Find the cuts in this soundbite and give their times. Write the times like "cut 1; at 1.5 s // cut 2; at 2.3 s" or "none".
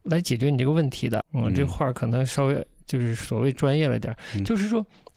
cut 1; at 1.2 s

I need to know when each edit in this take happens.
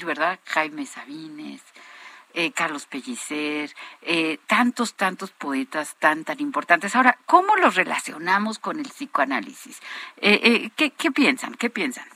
none

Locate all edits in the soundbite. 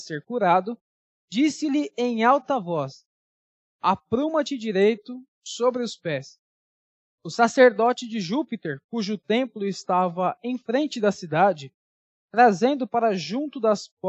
cut 1; at 7.1 s

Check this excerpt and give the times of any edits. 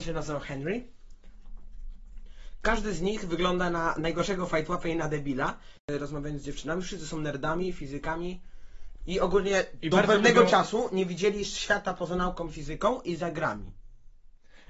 none

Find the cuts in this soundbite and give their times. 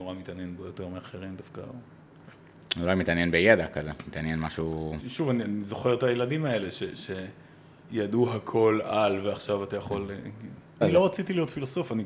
cut 1; at 5.0 s // cut 2; at 10.8 s

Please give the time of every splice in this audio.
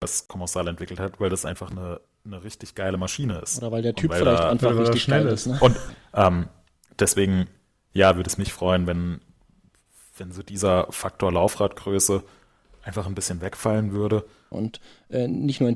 cut 1; at 5.9 s // cut 2; at 14.5 s

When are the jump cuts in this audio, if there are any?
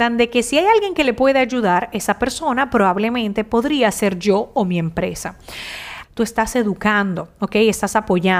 cut 1; at 6.0 s

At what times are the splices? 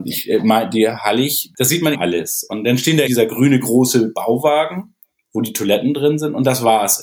cut 1; at 1.9 s // cut 2; at 3.1 s

